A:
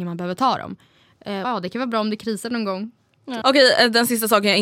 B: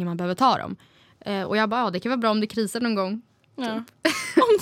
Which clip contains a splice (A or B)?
A